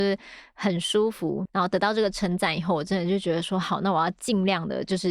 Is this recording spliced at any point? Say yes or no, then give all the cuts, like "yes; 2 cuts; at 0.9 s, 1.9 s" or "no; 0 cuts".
yes; 1 cut; at 1.5 s